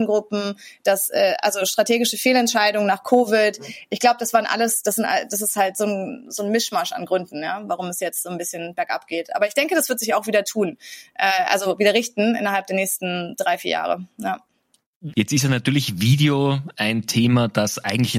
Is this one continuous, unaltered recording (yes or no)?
no